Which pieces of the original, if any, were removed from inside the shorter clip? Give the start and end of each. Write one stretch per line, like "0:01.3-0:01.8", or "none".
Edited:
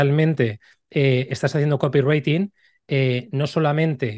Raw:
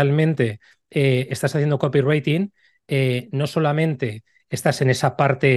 none